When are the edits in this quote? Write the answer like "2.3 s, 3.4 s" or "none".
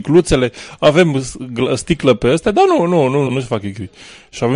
3.3 s

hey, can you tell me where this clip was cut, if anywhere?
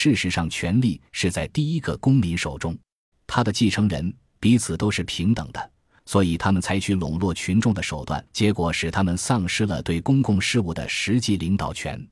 3.1 s, 6.0 s, 8.3 s

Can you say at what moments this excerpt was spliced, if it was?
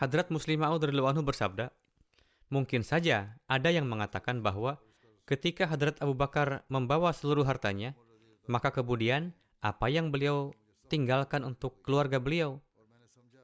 none

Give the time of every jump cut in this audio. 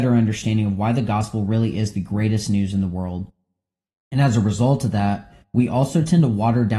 3.9 s

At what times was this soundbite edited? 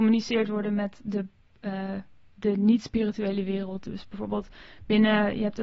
none

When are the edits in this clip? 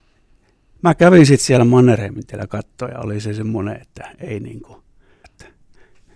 5.2 s

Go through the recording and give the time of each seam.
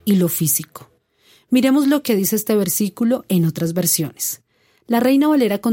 none

